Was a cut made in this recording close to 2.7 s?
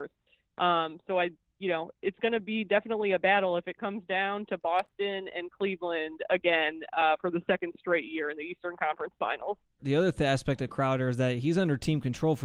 no; 1 cut; at 9.8 s

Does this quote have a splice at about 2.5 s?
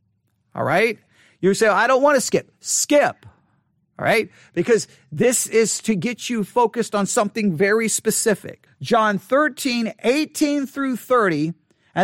no; 1 cut; at 8.7 s

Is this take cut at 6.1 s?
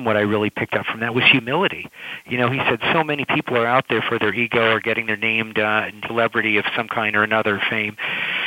yes; 1 cut; at 6.1 s

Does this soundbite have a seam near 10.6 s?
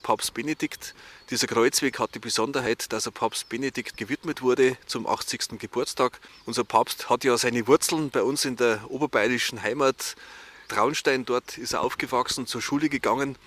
no; 0 cuts

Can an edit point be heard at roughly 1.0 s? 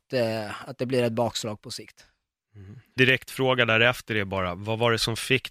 no; 1 cut; at 3.0 s

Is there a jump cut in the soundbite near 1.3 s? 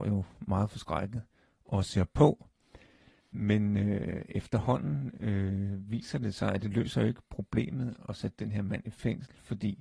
no; 1 cut; at 3.2 s

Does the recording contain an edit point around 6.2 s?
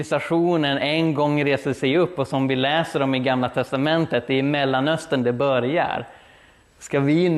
no; 0 cuts

